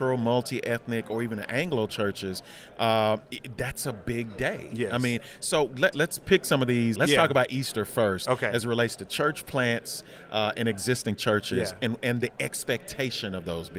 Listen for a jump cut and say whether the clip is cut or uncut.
cut